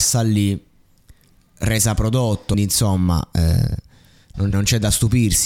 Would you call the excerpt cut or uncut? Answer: cut